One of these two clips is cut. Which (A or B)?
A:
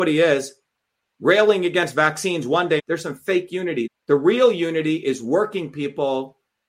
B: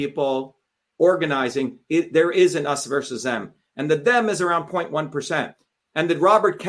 A